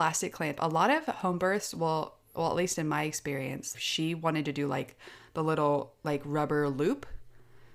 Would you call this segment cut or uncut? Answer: cut